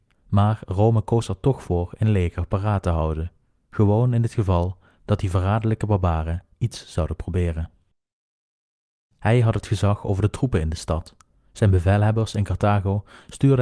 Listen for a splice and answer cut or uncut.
cut